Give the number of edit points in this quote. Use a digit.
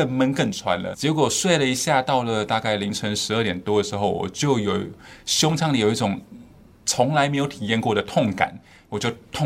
1